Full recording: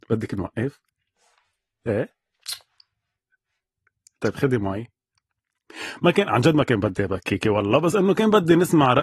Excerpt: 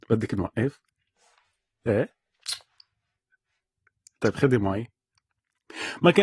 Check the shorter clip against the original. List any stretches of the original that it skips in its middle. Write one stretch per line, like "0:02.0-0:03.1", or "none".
none